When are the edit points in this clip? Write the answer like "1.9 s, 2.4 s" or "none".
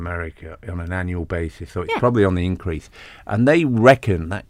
1.7 s